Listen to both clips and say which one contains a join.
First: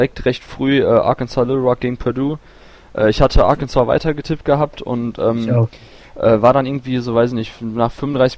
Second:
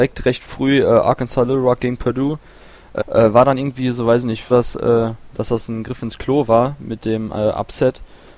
second; 2 cuts; at 3.0 s, 4.5 s

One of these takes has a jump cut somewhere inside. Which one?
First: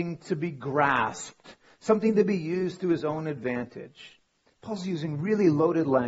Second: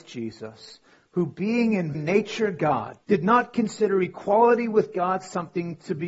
second; 2 cuts; at 1.9 s, 3.0 s

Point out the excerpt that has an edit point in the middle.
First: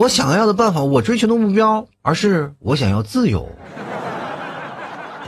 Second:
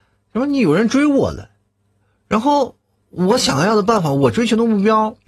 first; 1 cut; at 1.9 s

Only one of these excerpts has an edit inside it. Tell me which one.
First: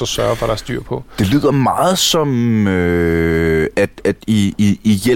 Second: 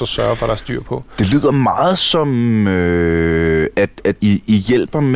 second; 1 cut; at 4.2 s

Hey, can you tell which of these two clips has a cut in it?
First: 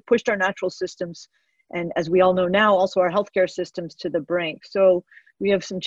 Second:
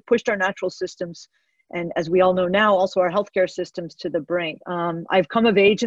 second; 1 cut; at 4.6 s

